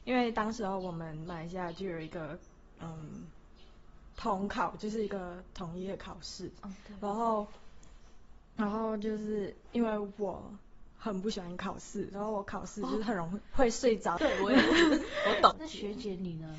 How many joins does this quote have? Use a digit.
2